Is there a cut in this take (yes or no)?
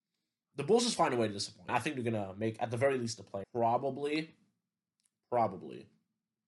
yes